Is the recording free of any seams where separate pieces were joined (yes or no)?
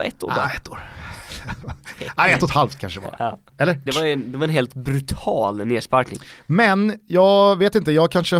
no